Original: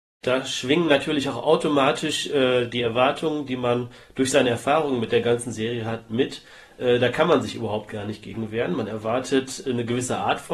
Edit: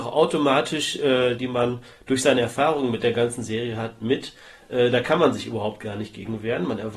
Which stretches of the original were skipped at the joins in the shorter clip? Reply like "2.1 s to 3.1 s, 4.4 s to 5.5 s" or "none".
2.7 s to 3.5 s

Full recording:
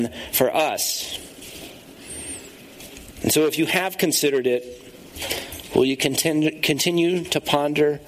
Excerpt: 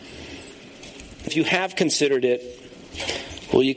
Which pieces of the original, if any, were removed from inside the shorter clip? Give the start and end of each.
3.2 s to 3.5 s

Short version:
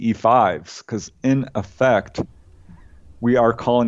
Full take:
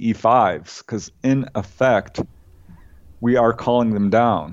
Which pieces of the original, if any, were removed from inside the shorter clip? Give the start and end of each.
none

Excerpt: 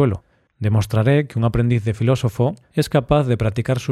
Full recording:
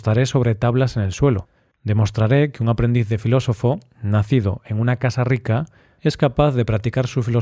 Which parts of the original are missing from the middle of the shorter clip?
3.9 s to 5.9 s

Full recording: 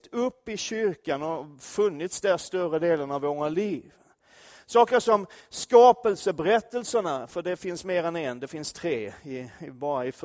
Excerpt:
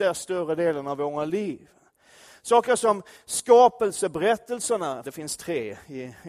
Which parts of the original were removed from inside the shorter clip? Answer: 7.3 s to 8.4 s

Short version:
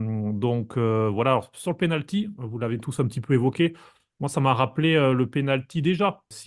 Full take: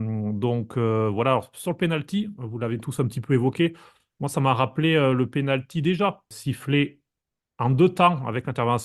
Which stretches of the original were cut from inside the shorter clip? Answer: none

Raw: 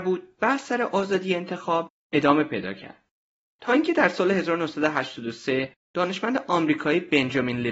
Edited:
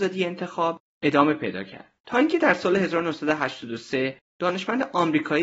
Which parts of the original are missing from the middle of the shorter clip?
3.1 s to 3.5 s

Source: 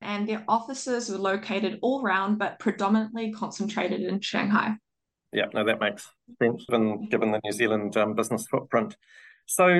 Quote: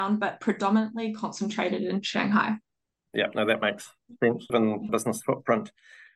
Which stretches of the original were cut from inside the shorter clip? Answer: 7.1 s to 8.1 s

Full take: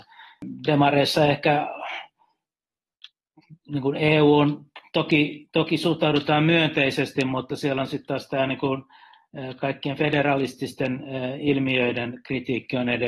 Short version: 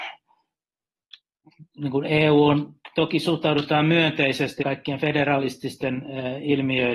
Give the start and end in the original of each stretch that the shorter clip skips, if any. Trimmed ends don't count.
4.8 s to 5.5 s, 7.2 s to 9.6 s

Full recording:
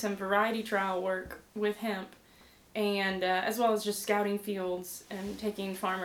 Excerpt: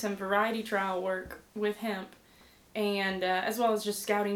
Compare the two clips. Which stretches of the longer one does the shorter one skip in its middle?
none

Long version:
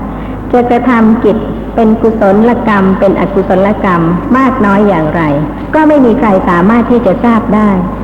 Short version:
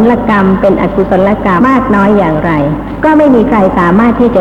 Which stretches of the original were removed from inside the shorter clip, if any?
4.0 s to 4.3 s

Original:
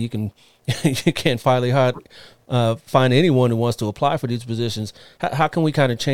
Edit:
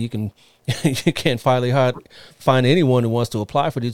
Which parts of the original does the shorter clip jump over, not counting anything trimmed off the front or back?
2.3 s to 2.8 s

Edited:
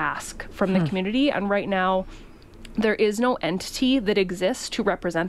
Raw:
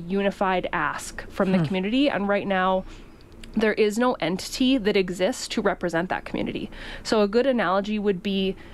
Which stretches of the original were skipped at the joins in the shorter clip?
none

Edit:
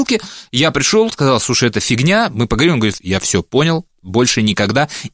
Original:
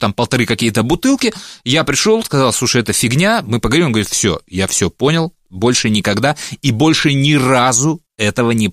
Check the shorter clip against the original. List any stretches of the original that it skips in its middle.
4.1 s to 4.5 s

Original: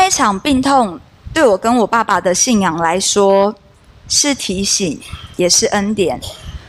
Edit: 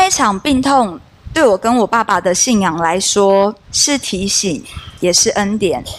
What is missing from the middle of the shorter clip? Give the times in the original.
3.6 s to 4.0 s

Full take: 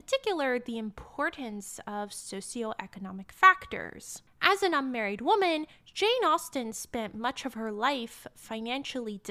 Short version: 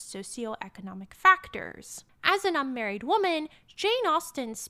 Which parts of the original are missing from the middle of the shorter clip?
none

